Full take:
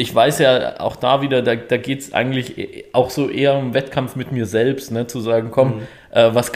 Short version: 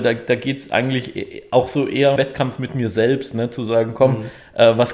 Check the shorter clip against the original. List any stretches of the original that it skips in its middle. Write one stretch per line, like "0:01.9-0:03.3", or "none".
0:03.6-0:03.7